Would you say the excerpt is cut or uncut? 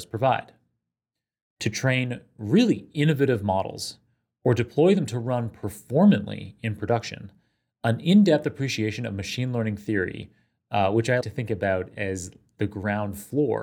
cut